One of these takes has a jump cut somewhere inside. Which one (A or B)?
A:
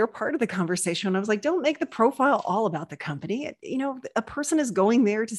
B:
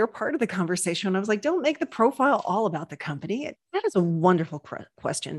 B